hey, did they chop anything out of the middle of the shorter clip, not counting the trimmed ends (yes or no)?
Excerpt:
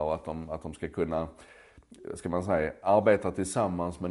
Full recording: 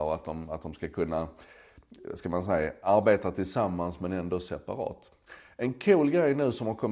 no